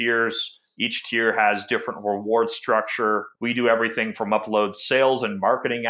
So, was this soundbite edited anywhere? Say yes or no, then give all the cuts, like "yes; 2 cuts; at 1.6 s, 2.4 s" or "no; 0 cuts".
yes; 1 cut; at 3.4 s